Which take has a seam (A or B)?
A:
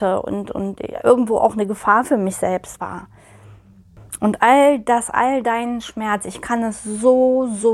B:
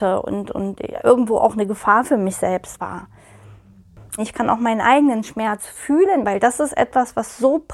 B